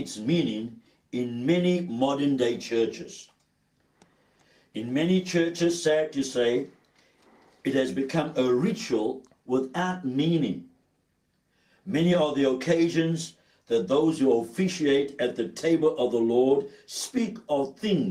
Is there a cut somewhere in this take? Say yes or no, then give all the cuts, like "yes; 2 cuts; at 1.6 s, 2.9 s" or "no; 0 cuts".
no; 0 cuts